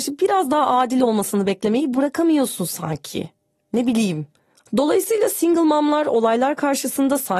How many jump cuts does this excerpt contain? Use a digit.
1